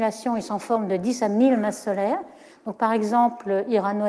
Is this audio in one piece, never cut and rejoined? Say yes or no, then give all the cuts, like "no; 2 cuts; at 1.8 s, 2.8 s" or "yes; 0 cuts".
no; 1 cut; at 2.5 s